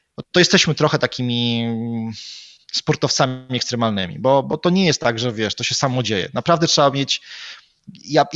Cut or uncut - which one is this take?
uncut